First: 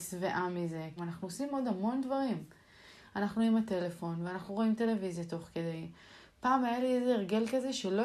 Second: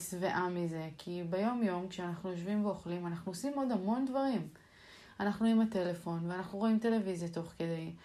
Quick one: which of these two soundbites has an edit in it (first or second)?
first